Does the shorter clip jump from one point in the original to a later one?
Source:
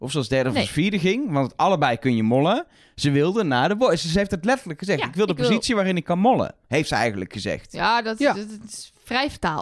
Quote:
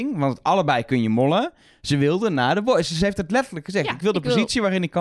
no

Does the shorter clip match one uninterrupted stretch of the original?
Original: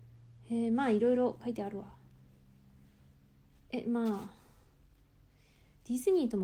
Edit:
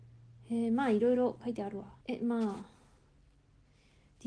no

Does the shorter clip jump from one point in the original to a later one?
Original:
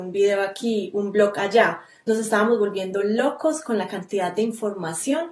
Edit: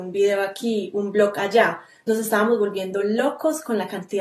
no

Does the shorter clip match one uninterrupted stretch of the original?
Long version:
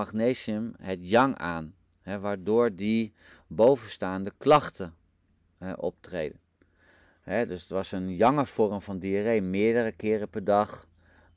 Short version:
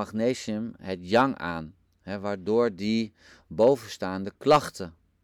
yes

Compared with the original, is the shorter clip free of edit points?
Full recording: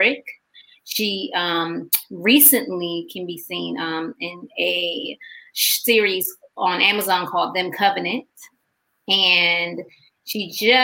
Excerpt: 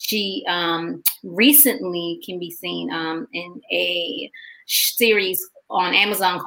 yes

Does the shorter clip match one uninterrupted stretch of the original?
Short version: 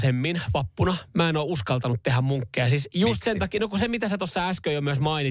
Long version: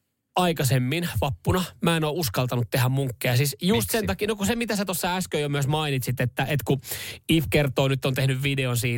yes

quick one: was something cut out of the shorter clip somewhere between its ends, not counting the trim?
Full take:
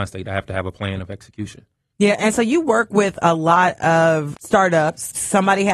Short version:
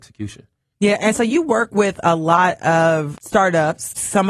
no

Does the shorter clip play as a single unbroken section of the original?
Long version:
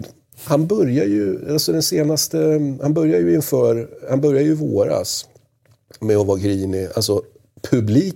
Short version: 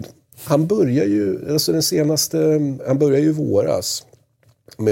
no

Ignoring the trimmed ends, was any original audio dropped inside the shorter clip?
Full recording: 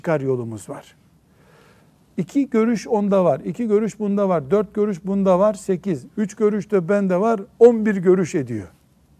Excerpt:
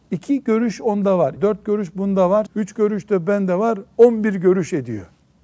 yes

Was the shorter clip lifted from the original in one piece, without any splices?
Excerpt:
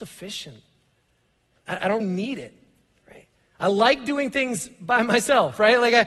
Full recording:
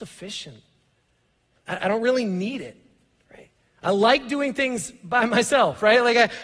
no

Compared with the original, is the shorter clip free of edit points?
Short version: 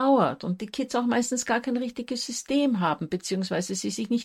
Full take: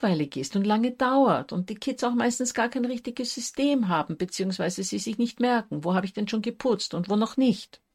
yes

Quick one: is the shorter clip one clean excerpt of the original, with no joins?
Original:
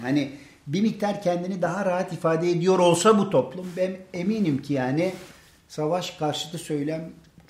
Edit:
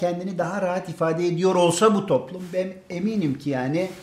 yes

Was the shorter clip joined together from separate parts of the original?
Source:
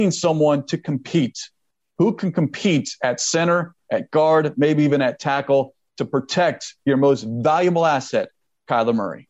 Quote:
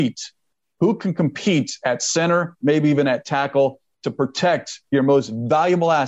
yes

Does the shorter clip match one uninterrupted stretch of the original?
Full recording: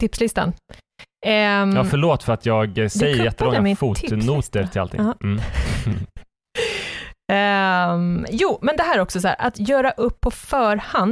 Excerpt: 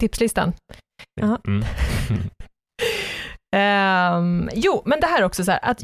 no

